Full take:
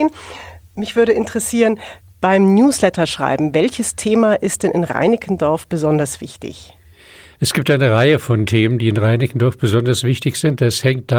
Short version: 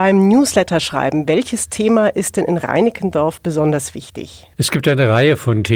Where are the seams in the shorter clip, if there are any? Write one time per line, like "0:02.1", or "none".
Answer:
0:04.5